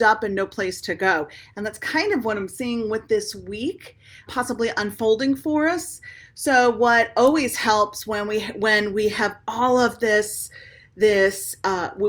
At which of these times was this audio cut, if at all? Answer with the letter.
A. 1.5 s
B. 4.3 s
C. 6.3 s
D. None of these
B